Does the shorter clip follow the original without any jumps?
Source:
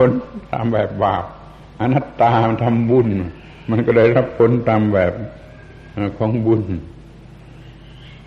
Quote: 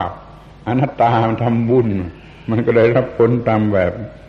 no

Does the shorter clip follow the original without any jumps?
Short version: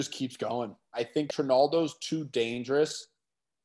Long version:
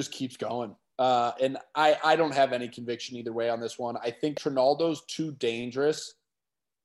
no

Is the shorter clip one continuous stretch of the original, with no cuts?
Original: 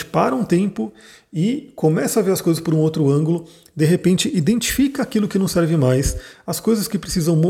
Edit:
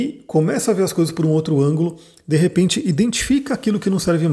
yes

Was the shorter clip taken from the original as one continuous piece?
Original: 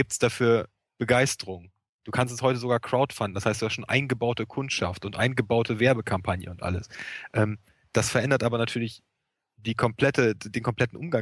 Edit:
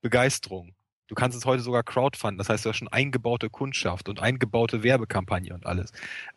yes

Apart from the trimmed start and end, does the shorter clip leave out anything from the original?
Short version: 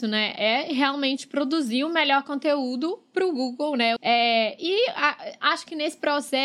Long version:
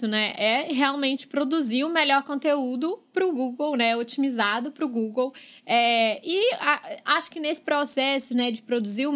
yes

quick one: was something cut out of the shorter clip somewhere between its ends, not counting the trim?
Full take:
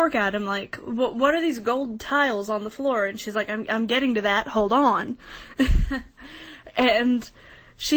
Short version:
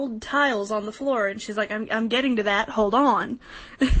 no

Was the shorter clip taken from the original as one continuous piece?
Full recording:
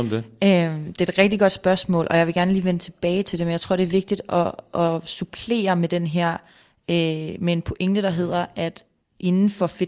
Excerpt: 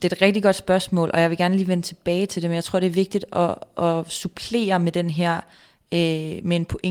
yes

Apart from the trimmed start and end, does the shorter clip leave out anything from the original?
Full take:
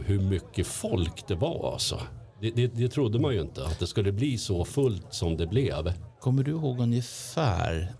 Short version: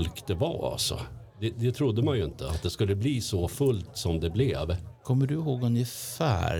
yes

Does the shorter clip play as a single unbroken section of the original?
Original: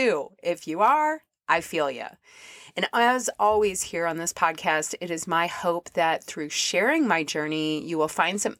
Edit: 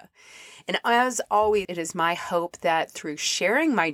no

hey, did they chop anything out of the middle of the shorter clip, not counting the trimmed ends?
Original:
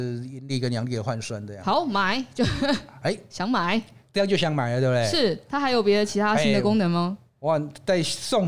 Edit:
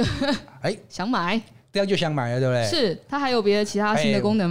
no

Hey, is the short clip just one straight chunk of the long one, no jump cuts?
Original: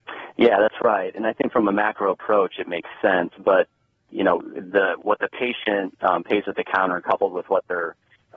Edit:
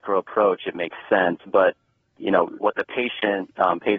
no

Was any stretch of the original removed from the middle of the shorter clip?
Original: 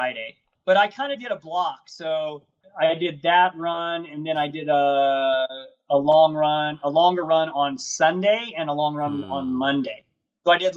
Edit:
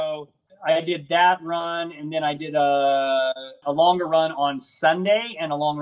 yes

